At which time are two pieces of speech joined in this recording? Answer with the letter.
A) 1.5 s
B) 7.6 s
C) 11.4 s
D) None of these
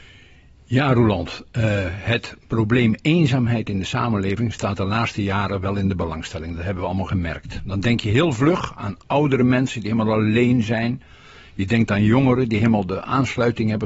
D